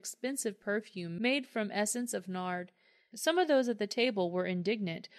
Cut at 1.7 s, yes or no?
no